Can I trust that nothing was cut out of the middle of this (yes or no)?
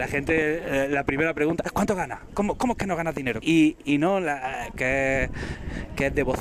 no